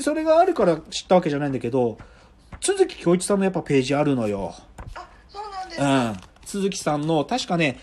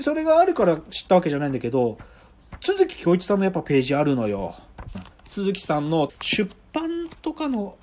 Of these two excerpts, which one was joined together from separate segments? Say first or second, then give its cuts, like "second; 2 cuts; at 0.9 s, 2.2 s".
second; 2 cuts; at 4.9 s, 6.1 s